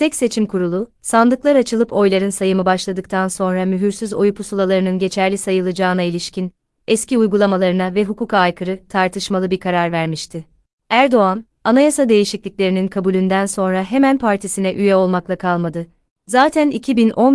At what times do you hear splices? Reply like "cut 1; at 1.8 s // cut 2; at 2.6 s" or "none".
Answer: cut 1; at 16.1 s